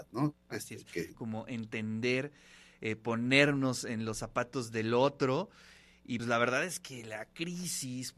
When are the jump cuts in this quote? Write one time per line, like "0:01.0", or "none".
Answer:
0:01.1
0:06.2